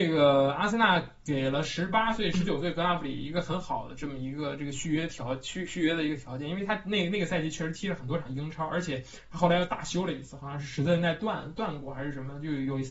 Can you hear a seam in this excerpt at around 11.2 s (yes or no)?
no